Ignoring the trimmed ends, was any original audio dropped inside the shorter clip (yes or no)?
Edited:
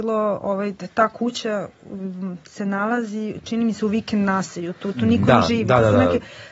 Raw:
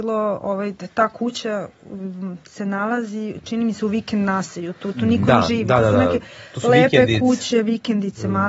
no